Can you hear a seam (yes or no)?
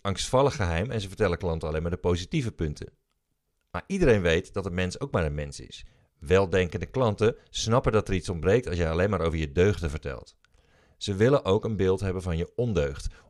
no